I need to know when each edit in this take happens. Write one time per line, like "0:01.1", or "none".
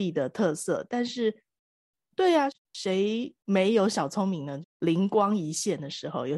0:04.6